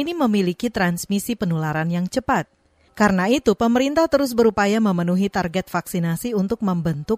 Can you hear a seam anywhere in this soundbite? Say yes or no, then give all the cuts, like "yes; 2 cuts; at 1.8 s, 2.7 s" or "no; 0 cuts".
no; 0 cuts